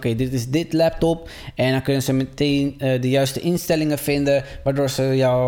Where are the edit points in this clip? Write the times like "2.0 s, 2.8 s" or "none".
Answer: none